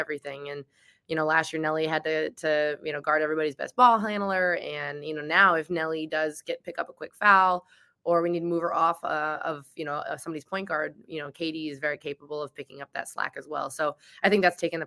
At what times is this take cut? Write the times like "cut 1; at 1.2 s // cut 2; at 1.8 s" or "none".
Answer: none